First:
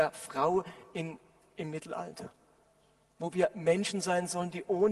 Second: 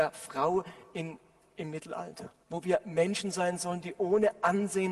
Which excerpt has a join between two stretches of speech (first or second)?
second